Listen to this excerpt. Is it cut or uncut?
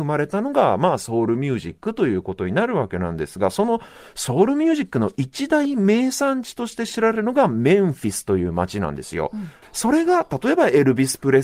cut